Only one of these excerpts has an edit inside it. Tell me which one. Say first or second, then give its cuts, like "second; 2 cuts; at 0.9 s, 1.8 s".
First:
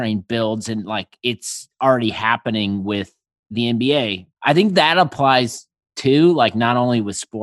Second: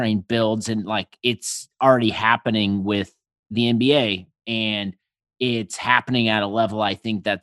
first; 1 cut; at 4.3 s